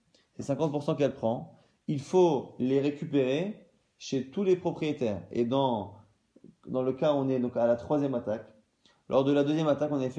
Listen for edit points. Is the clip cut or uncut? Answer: uncut